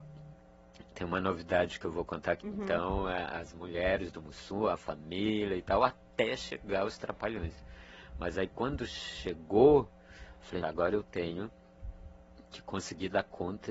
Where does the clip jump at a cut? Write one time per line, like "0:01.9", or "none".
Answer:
0:02.4
0:10.6